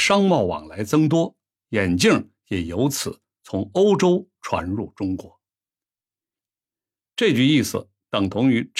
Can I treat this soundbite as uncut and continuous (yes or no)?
no